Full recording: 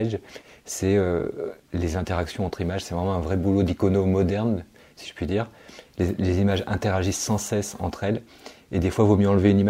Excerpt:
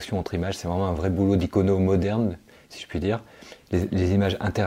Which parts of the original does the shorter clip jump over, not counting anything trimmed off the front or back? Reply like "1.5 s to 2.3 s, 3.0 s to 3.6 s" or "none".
none